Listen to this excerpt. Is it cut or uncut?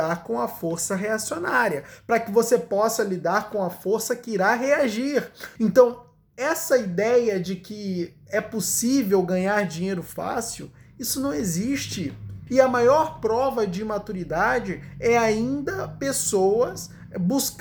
cut